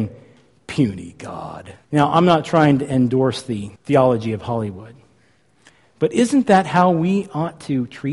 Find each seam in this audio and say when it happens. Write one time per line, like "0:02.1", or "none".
0:01.8
0:03.8